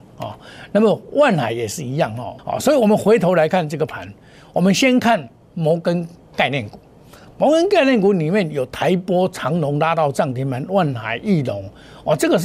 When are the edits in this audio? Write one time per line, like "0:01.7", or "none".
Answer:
0:02.4

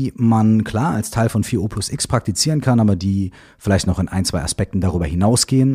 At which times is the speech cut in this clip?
none

